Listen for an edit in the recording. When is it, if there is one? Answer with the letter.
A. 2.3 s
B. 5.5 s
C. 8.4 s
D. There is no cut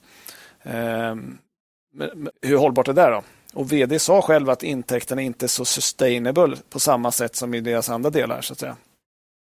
A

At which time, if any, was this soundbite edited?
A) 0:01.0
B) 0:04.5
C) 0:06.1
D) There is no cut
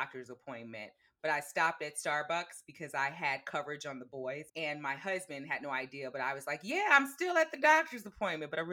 B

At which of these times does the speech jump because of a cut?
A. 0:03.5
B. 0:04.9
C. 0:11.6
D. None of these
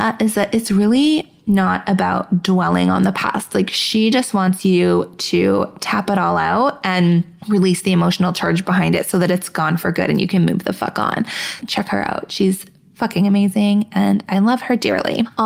C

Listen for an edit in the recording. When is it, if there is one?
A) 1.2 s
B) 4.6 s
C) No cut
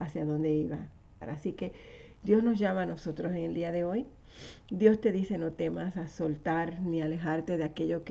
A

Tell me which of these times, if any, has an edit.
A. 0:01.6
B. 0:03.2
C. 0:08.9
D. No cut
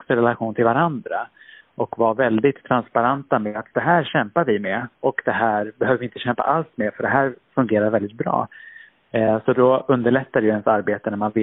C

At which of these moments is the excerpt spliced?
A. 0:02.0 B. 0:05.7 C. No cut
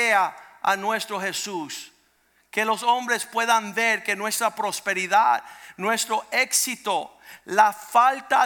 C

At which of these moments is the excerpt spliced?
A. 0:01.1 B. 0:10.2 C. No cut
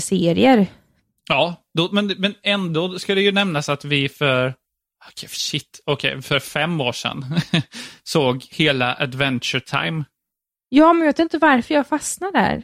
C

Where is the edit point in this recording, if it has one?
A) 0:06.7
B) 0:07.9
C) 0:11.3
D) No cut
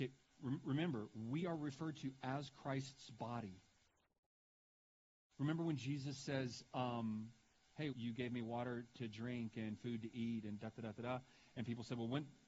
B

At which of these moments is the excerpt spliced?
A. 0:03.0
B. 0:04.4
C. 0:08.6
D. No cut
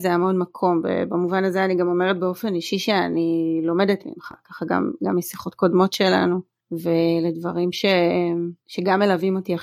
D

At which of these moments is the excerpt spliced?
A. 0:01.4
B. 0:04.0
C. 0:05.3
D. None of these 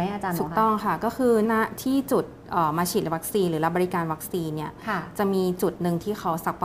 A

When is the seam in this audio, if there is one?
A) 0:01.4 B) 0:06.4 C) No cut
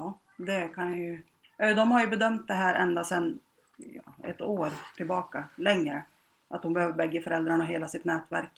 A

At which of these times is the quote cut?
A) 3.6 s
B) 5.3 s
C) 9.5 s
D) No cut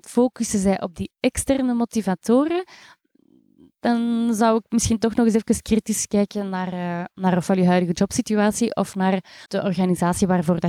C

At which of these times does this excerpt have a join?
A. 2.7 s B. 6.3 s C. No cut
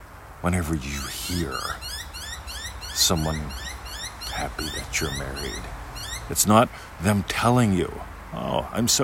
B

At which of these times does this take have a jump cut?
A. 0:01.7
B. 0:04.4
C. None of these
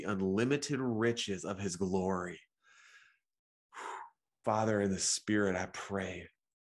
B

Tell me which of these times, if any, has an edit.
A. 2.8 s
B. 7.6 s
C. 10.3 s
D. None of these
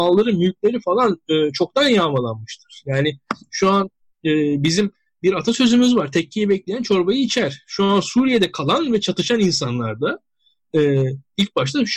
D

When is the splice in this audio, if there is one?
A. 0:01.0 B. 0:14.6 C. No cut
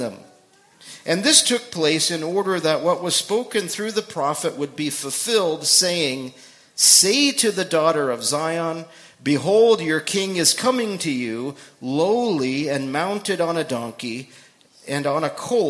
C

